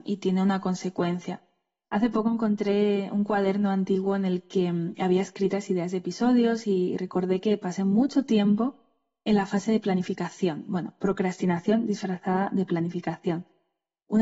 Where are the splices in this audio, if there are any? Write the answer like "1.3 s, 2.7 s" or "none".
1.8 s

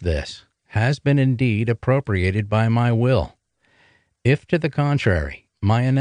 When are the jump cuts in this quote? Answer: none

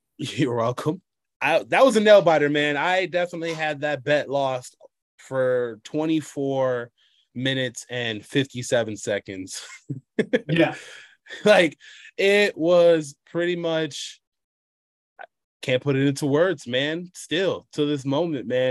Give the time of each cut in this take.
none

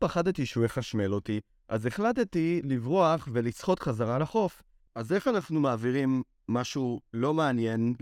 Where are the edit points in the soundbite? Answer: 4.9 s

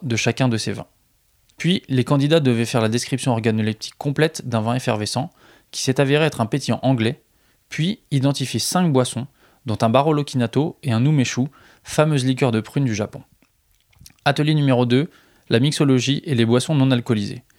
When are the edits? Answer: none

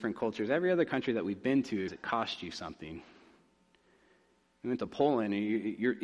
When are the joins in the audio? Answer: 1.9 s

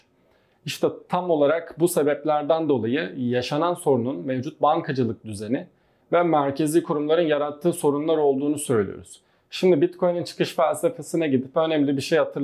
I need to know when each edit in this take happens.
none

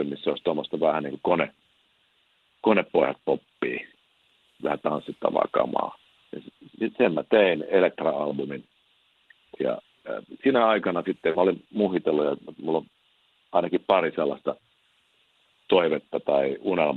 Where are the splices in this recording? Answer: 9.6 s

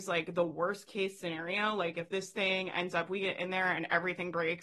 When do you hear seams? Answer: none

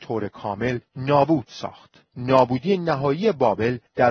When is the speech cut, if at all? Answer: none

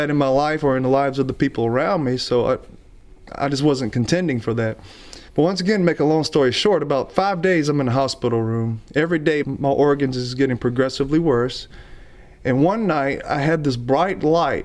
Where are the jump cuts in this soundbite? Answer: 5.3 s, 9.4 s

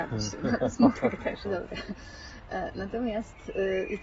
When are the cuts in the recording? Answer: 1.4 s

